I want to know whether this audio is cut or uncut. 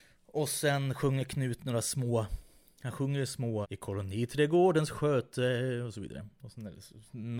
cut